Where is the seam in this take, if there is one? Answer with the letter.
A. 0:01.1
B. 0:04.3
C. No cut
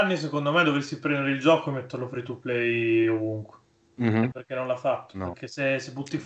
B